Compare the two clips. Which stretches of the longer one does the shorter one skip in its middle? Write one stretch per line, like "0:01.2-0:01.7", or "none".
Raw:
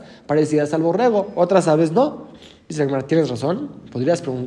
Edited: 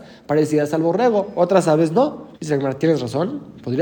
0:02.3-0:02.6